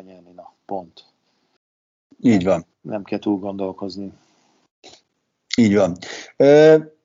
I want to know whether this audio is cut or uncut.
uncut